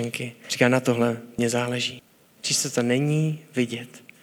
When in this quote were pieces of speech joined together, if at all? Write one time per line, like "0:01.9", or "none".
0:02.3